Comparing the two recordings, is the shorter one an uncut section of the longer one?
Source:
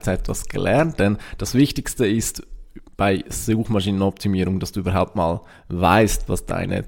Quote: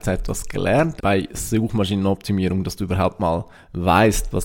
no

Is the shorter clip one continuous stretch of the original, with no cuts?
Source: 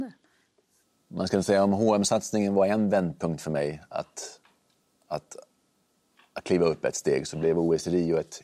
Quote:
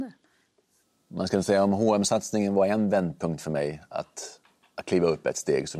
no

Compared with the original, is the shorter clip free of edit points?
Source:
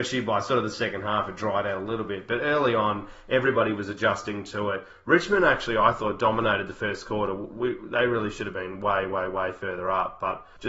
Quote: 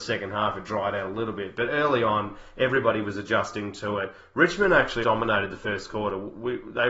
no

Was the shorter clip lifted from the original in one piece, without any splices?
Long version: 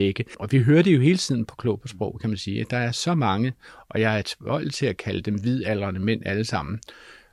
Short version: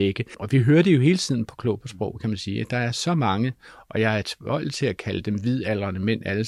yes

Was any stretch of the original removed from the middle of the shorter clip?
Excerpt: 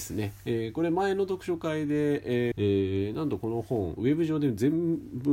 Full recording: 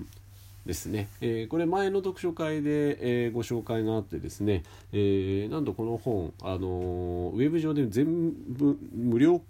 yes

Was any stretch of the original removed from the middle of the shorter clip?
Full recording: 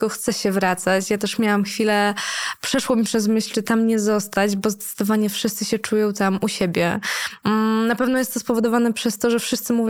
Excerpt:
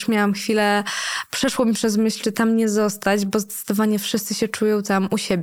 no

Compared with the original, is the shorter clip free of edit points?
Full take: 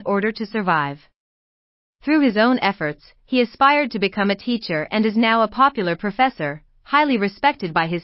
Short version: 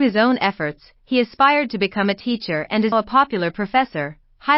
no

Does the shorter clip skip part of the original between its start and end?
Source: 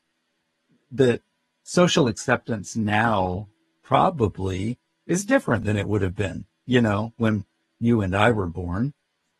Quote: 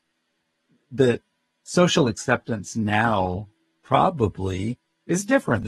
no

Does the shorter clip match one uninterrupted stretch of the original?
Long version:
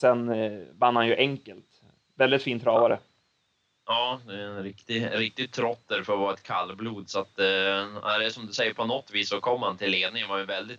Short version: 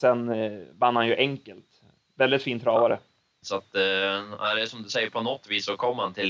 no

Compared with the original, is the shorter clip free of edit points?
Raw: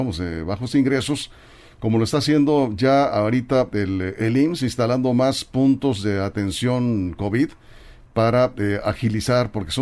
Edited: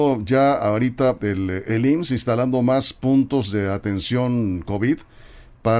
yes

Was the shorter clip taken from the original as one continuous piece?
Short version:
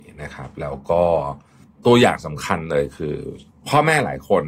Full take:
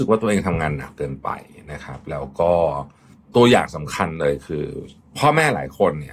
yes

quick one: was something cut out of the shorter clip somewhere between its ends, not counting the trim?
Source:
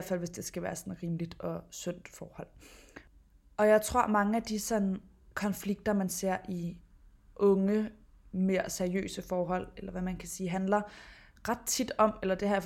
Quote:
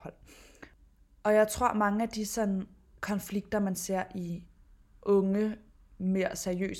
no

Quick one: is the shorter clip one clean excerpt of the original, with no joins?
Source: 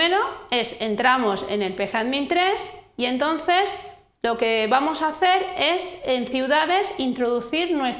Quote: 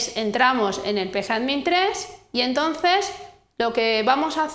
yes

